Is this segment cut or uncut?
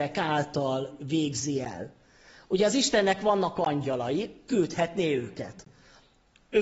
uncut